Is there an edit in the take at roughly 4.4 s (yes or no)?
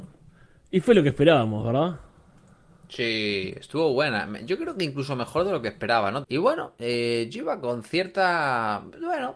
no